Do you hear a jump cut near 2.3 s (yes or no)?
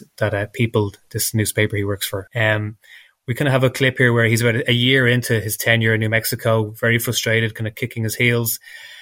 yes